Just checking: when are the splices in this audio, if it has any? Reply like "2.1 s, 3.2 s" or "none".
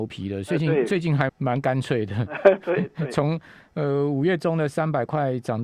1.3 s